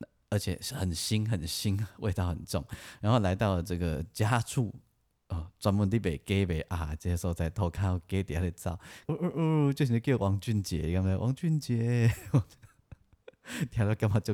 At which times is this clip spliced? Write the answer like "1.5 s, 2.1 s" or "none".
9.1 s